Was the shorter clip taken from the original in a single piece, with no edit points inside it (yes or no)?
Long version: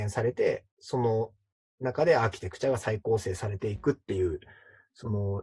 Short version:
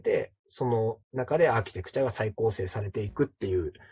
no